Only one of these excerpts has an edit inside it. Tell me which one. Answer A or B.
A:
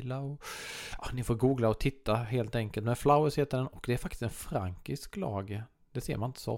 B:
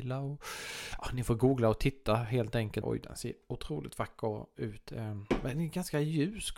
B